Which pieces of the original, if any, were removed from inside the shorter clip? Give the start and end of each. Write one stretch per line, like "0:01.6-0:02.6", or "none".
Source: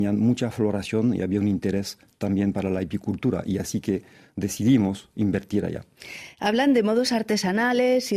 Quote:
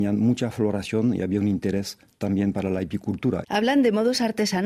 0:03.4-0:06.4